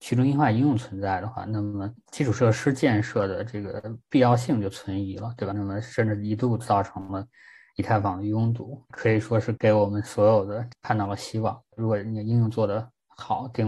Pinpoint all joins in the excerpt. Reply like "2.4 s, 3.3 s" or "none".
5.5 s, 10.7 s